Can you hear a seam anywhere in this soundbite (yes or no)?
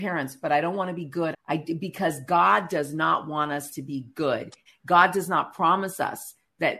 yes